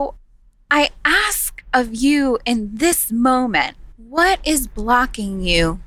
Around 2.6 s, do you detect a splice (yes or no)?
no